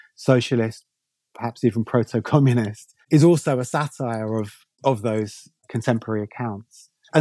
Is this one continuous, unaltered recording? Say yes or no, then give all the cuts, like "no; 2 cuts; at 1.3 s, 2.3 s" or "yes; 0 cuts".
yes; 0 cuts